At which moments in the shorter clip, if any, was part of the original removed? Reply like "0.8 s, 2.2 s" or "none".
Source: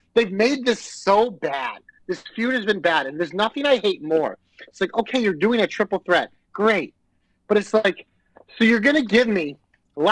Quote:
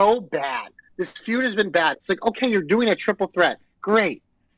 1.9 s